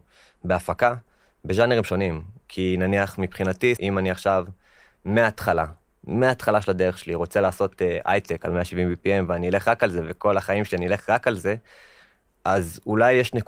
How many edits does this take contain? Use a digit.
1